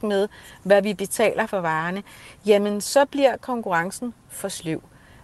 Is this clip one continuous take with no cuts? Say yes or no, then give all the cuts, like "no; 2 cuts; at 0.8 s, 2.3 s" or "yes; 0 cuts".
yes; 0 cuts